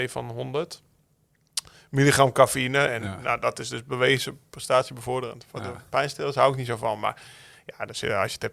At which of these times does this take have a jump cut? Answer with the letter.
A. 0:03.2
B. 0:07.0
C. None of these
C